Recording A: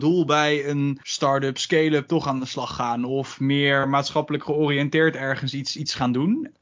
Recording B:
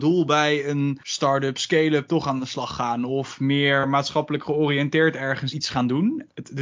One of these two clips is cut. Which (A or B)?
B